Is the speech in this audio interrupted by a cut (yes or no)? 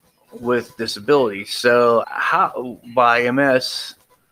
yes